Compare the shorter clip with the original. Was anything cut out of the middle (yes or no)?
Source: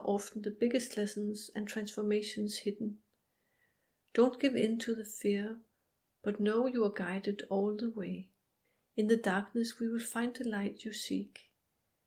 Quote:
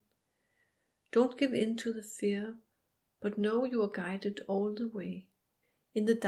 no